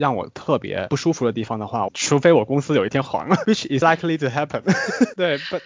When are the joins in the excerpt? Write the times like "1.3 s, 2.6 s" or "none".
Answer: 1.9 s, 3.8 s

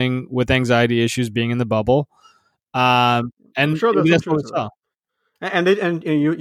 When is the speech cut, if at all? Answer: none

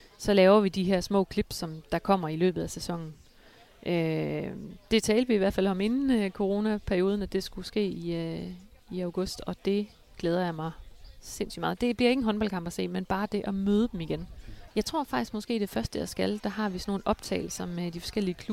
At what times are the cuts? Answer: 14.7 s, 16.4 s

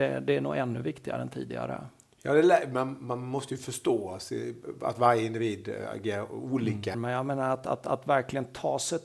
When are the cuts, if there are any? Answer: 6.9 s

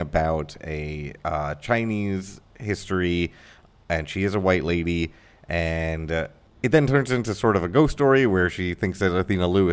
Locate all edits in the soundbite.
none

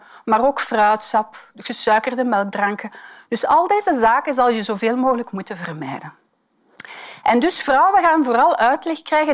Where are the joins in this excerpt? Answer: none

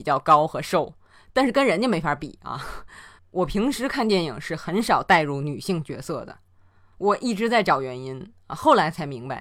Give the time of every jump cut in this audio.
3.2 s

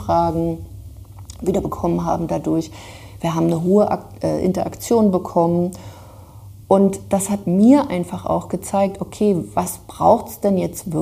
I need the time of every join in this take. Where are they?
none

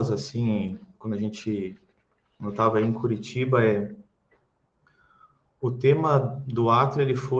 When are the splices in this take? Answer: none

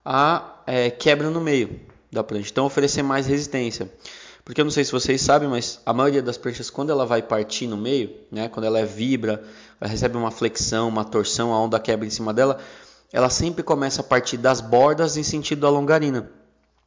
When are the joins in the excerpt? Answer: none

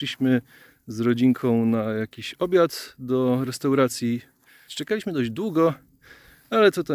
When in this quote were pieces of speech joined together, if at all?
4.7 s

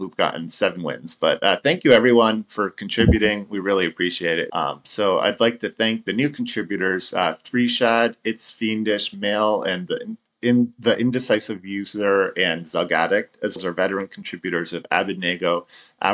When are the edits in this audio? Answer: 4.5 s, 13.6 s

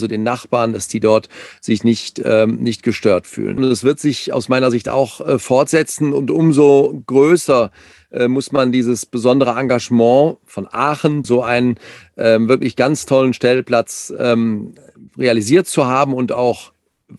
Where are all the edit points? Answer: 3.6 s, 11.2 s

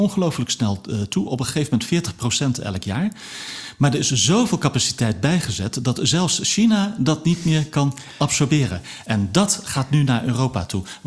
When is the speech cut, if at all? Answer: none

